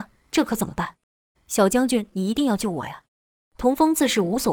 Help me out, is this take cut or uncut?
cut